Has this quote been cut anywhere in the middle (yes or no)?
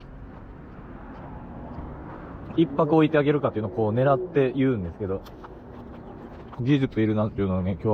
yes